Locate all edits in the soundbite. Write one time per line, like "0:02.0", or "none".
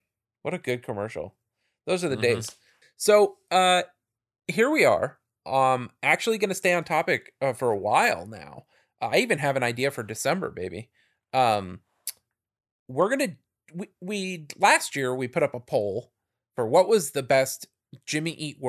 none